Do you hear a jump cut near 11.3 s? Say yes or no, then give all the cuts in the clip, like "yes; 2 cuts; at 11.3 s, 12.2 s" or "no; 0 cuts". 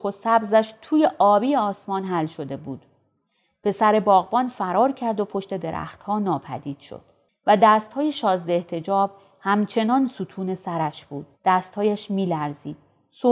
yes; 1 cut; at 11.3 s